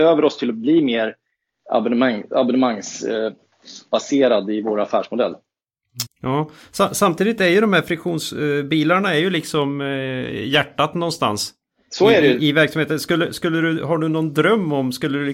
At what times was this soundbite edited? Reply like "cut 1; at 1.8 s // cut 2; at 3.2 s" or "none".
cut 1; at 6.1 s